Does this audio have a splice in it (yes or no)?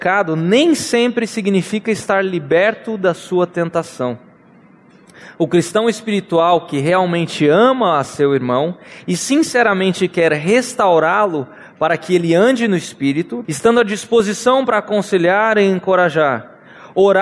yes